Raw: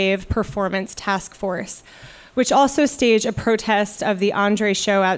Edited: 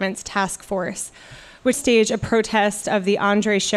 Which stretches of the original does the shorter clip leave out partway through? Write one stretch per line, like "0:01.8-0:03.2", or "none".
0:02.4-0:02.9

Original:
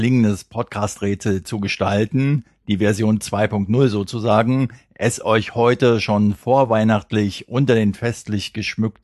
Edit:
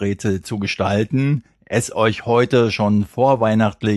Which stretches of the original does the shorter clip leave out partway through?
0:02.6-0:04.9

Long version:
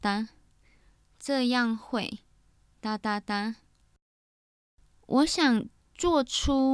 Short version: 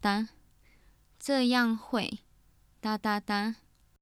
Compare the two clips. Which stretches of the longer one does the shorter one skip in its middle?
none

